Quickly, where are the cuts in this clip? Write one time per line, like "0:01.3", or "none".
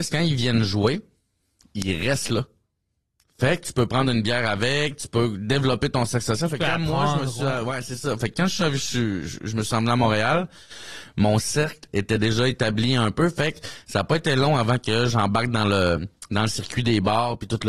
none